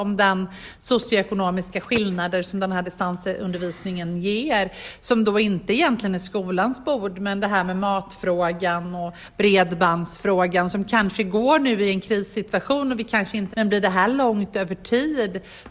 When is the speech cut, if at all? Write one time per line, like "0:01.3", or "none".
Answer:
0:13.5